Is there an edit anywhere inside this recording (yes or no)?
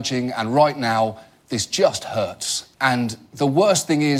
yes